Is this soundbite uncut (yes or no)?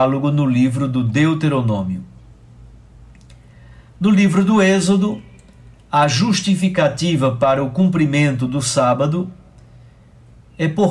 yes